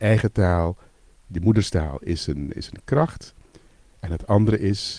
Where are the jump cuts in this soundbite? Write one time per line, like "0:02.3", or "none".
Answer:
none